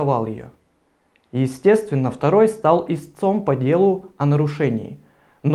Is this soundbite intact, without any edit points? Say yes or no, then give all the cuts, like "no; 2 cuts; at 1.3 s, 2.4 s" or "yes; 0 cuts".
yes; 0 cuts